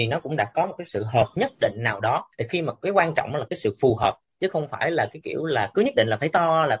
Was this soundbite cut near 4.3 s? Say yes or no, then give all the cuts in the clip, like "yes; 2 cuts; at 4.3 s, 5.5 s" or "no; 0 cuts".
no; 2 cuts; at 2.3 s, 5.7 s